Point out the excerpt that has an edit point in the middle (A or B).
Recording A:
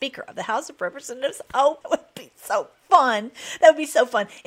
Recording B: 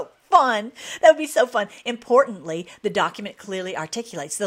A